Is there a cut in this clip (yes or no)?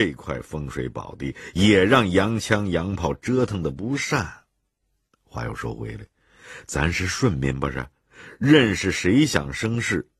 no